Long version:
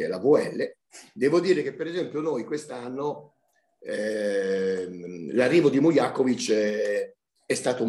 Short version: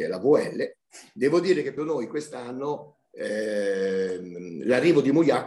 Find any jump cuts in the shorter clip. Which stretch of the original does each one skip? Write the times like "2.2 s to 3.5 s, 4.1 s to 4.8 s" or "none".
1.8 s to 2.1 s, 3.4 s to 3.7 s